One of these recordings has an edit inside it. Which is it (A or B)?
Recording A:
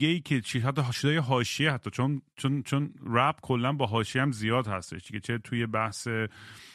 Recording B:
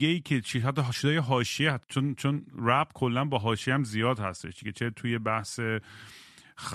B